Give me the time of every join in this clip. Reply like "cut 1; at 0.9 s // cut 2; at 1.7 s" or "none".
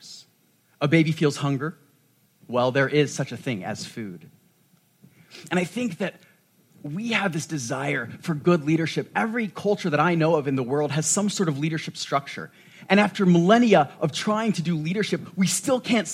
none

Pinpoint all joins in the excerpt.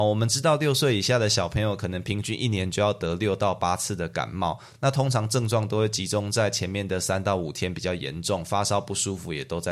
none

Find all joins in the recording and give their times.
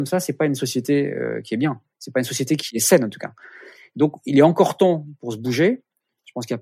none

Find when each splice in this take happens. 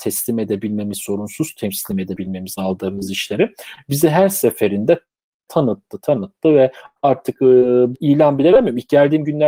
cut 1; at 6.0 s // cut 2; at 7.9 s

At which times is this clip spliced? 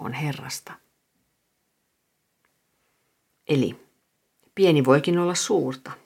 none

